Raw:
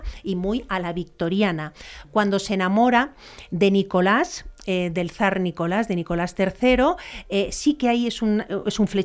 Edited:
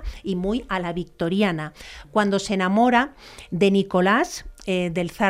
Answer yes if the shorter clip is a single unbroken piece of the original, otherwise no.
yes